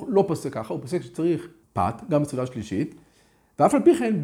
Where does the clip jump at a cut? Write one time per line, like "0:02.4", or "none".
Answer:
0:01.6

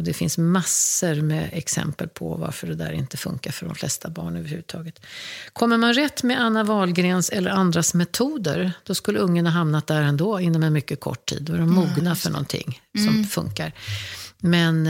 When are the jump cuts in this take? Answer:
none

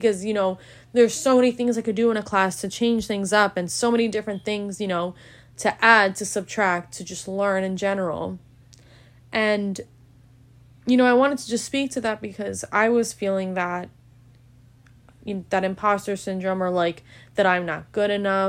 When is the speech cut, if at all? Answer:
none

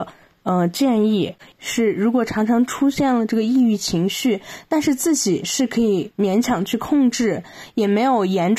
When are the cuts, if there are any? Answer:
0:01.5

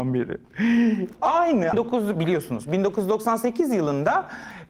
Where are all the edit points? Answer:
0:01.7

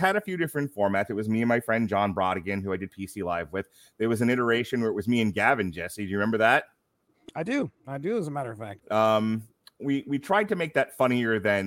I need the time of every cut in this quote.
0:08.8

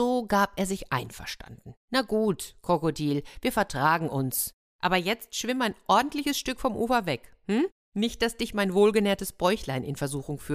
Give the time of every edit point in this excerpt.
0:01.8
0:04.6

